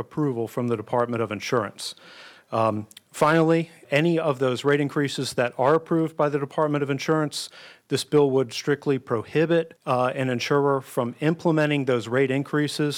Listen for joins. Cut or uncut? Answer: cut